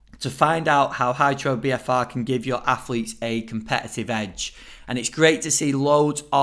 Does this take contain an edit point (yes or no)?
no